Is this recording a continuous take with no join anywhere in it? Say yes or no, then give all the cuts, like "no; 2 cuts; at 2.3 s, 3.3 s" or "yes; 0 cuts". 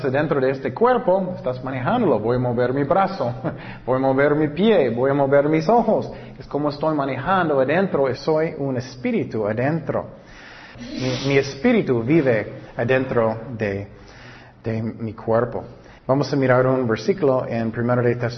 no; 3 cuts; at 8.2 s, 10.7 s, 16.0 s